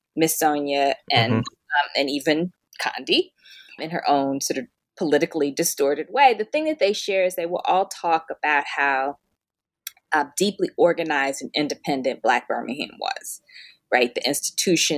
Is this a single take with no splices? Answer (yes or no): no